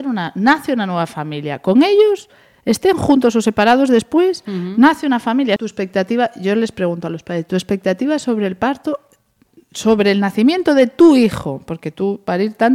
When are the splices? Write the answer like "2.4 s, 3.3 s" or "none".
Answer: 5.6 s